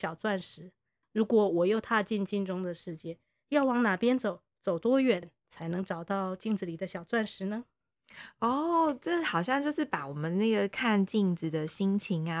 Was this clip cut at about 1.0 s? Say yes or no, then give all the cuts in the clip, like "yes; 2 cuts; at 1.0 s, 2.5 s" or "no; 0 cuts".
yes; 1 cut; at 1.0 s